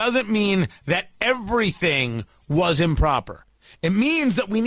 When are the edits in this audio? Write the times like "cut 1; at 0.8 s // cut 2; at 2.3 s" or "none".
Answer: none